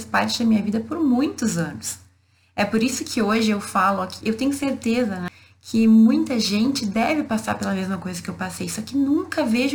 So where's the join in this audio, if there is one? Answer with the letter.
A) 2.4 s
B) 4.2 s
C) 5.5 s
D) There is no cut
B